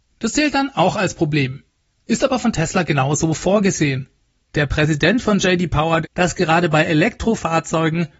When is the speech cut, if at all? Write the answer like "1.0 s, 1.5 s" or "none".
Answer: 4.4 s, 6.0 s